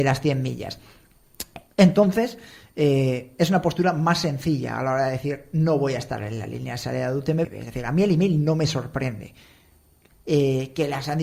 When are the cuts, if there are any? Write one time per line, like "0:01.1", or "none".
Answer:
0:07.4
0:10.1